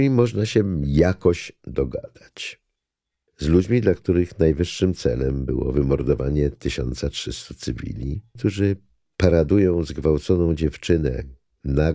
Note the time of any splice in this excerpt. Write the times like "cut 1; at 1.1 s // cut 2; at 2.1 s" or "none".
cut 1; at 3.3 s // cut 2; at 8.4 s